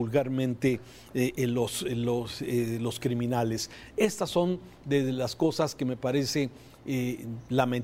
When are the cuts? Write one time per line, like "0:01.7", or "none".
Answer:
none